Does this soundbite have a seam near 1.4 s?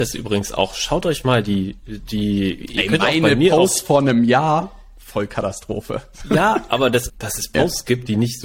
no; 1 cut; at 7.1 s

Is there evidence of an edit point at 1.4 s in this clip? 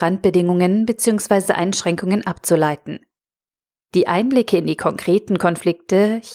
no; 0 cuts

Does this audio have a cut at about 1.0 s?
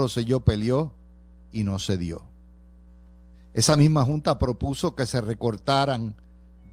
no; 1 cut; at 3.3 s

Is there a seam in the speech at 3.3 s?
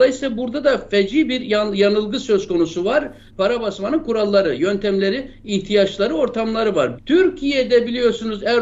yes; 2 cuts; at 3.3 s, 6.9 s

